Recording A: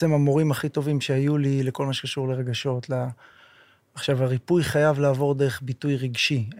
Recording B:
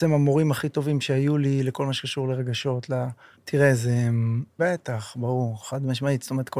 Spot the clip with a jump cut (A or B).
B